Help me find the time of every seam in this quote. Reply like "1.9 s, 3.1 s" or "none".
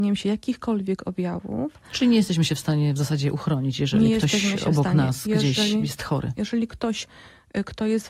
6.4 s